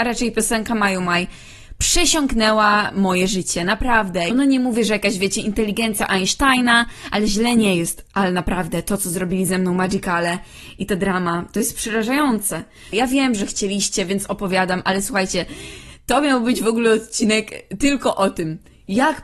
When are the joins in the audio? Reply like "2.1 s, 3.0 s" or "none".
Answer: 4.3 s, 12.9 s